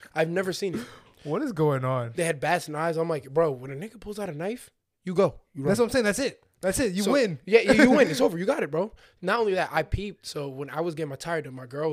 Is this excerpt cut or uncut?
uncut